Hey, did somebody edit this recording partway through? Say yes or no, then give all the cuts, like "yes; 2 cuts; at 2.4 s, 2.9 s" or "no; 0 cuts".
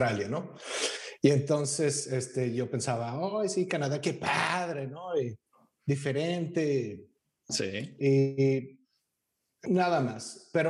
yes; 1 cut; at 7.5 s